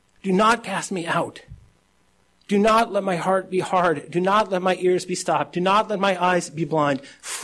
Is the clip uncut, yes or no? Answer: yes